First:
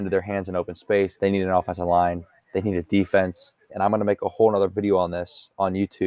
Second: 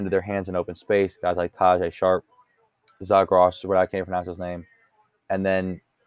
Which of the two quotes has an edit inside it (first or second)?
first